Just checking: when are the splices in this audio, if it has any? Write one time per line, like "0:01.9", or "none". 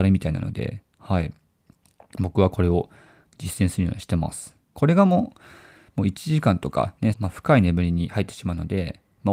0:04.8
0:07.1

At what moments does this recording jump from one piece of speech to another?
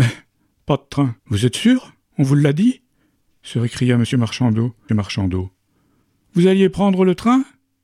0:01.2
0:04.9

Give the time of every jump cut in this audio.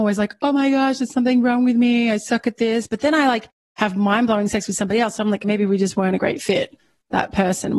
0:05.4

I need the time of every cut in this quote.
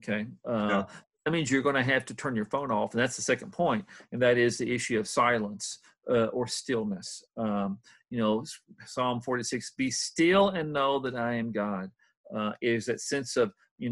none

